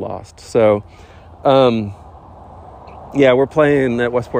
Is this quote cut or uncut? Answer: uncut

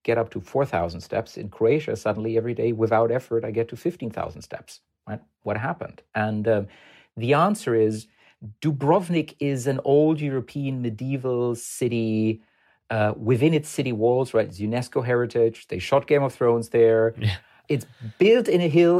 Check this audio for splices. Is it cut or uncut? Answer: uncut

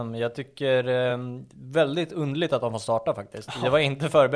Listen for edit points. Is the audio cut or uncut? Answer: uncut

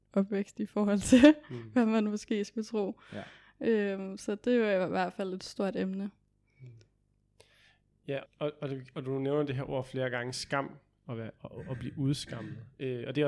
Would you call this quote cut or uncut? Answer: cut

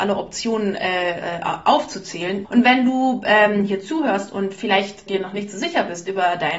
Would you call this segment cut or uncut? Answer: cut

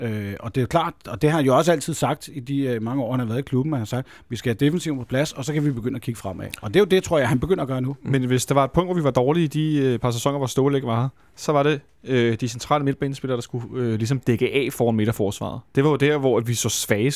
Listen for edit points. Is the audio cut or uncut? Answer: uncut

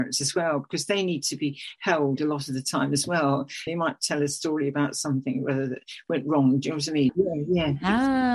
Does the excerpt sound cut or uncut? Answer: cut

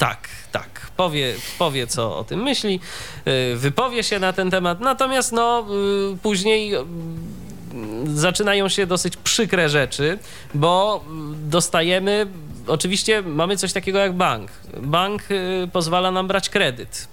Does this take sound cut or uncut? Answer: uncut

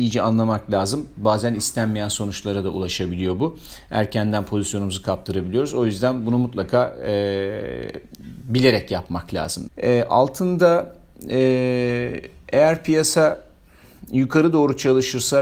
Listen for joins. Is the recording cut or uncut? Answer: cut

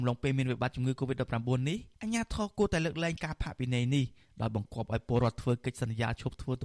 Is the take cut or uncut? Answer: cut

